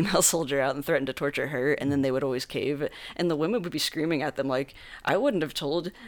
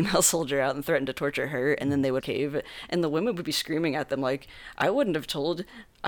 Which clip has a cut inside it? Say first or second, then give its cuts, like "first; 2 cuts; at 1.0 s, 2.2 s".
second; 1 cut; at 2.2 s